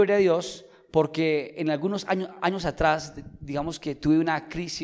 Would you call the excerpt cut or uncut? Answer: uncut